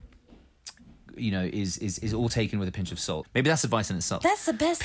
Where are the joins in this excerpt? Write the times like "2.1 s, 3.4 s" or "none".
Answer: 3.2 s